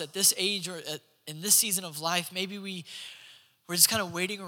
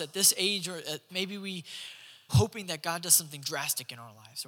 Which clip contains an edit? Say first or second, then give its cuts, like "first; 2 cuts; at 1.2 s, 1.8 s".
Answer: second; 2 cuts; at 1.1 s, 2.3 s